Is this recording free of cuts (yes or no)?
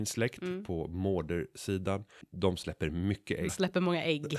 no